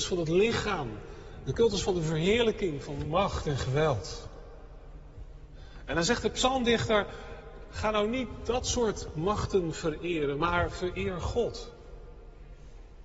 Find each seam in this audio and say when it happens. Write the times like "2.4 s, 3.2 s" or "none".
none